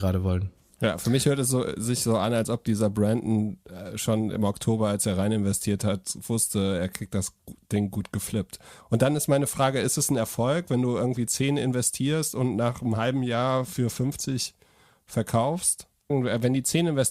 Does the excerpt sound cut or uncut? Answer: uncut